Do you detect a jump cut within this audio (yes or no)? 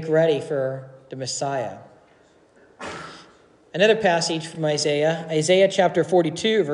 no